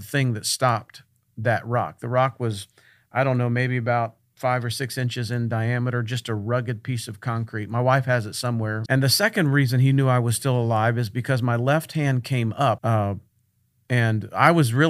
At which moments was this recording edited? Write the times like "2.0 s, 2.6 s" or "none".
8.9 s, 12.8 s